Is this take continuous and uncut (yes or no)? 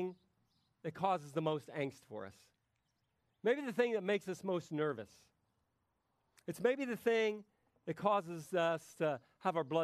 yes